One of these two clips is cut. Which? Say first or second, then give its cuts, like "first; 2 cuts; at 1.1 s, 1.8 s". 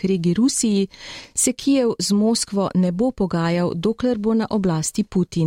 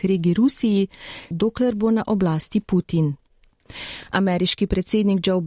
second; 1 cut; at 1.3 s